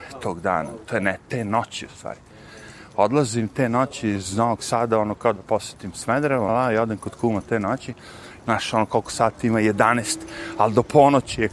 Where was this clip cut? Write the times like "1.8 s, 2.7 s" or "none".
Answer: 6.5 s, 8.4 s